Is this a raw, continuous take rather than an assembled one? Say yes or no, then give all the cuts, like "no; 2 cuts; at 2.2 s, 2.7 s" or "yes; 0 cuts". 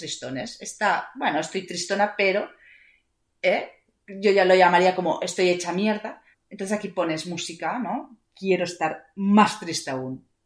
no; 2 cuts; at 6.3 s, 8.2 s